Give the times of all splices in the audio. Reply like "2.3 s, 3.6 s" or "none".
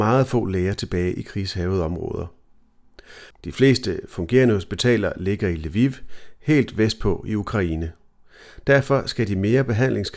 3.3 s